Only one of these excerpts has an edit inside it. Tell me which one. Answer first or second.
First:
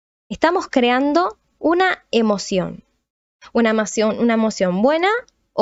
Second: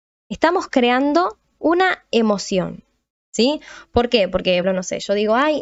second